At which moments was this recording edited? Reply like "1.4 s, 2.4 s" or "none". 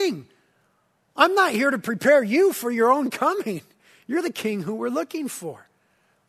none